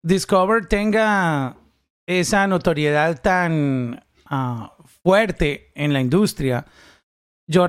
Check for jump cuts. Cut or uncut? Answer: cut